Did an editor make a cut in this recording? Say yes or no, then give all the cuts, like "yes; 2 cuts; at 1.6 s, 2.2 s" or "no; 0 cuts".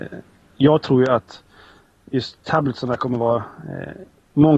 no; 0 cuts